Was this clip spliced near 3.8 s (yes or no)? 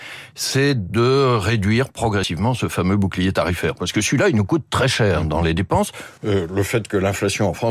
no